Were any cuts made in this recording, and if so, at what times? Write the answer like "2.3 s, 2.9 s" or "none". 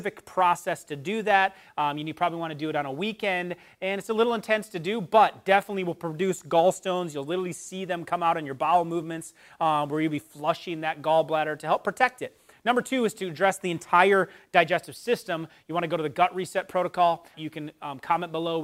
17.3 s

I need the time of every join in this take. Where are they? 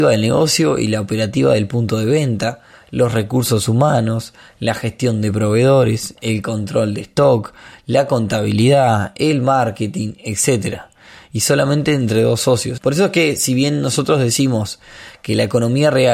12.8 s

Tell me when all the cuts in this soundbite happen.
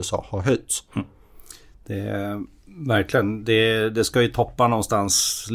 none

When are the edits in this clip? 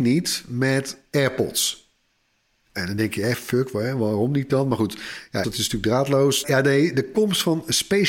5.4 s, 6.4 s

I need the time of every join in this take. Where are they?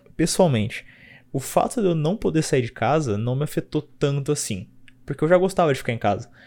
none

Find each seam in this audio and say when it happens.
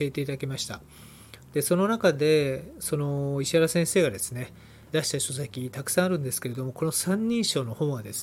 4.9 s

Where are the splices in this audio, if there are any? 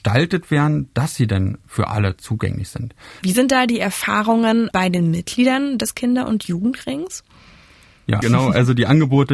3.2 s, 8.2 s

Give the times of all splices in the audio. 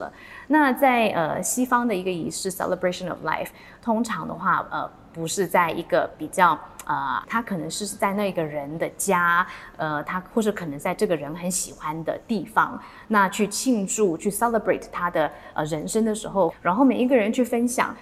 7.2 s, 16.5 s

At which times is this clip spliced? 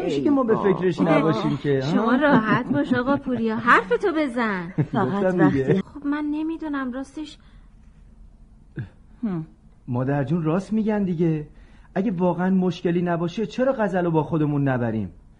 5.8 s

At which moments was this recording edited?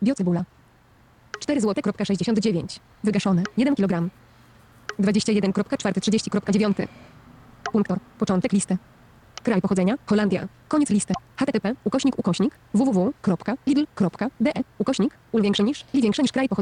none

